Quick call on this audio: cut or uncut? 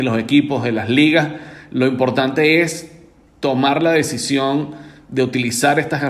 uncut